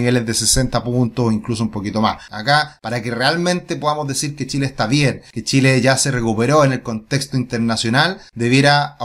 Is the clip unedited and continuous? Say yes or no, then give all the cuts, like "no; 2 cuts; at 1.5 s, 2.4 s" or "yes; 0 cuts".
no; 1 cut; at 2.3 s